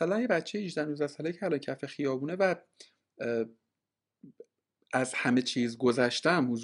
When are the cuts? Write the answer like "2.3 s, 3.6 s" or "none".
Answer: none